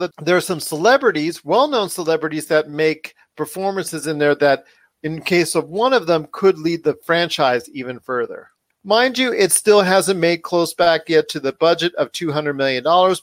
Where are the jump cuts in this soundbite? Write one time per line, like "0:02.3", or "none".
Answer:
0:08.7